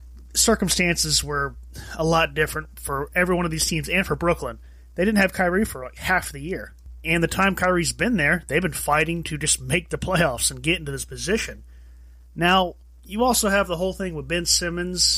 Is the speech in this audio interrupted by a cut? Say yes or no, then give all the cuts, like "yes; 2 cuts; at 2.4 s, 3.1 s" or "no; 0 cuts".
no; 0 cuts